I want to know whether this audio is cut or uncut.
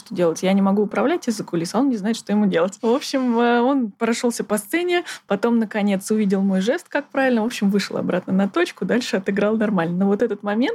uncut